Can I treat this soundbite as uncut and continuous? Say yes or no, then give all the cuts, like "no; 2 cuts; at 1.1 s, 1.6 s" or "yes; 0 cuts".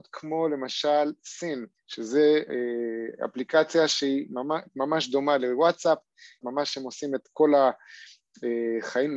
no; 2 cuts; at 1.7 s, 6.4 s